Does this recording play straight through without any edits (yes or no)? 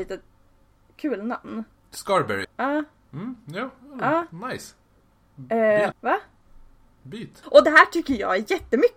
no